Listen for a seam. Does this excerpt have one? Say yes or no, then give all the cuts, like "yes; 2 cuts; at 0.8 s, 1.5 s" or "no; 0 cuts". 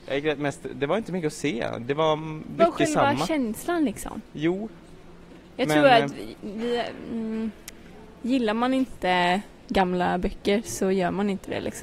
yes; 1 cut; at 2.6 s